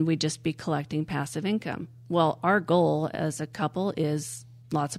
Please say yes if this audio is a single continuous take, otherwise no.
yes